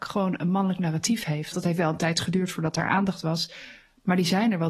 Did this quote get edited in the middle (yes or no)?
yes